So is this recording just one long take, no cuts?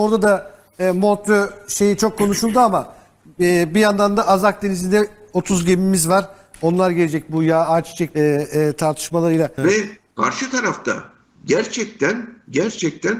no; 2 cuts; at 8.1 s, 9.6 s

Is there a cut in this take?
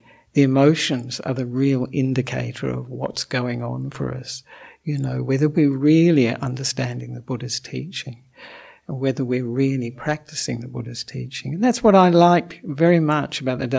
no; 0 cuts

